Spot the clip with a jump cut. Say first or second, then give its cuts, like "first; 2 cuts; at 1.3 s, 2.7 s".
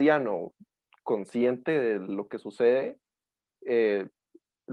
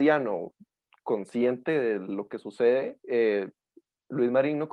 second; 1 cut; at 3.0 s